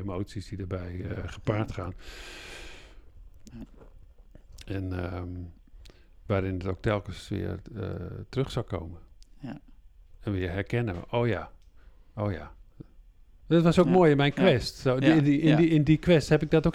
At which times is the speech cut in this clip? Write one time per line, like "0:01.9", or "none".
0:03.5

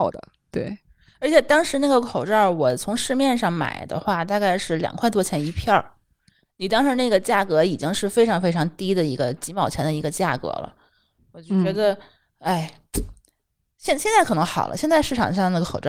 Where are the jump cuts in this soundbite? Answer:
none

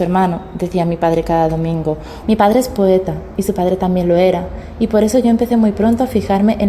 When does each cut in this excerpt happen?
0:02.2

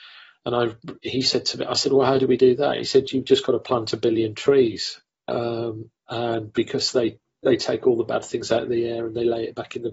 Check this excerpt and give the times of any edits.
none

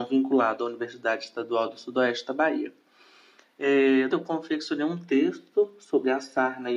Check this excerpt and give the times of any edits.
0:04.1

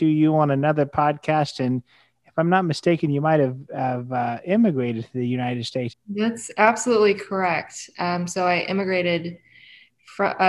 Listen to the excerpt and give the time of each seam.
0:05.9

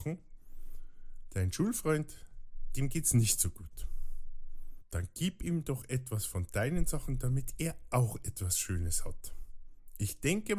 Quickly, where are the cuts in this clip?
none

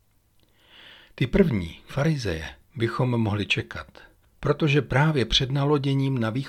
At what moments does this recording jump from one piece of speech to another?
none

